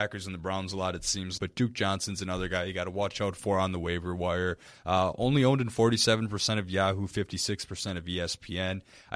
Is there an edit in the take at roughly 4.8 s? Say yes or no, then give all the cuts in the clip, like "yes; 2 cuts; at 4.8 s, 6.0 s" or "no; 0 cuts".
no; 1 cut; at 1.4 s